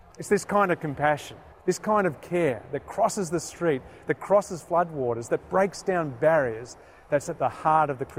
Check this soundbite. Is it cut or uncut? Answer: cut